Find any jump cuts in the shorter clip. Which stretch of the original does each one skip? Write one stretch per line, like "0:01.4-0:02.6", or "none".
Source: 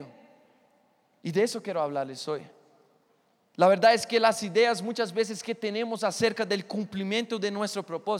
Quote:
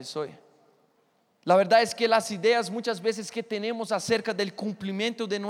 none